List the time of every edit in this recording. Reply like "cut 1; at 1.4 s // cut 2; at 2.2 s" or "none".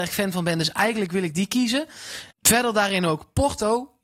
cut 1; at 2.3 s